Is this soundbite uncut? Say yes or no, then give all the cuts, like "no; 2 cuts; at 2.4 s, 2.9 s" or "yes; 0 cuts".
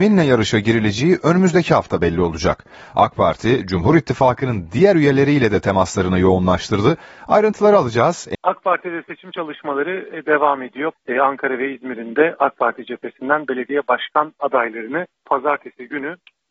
no; 3 cuts; at 8.3 s, 10.9 s, 15.2 s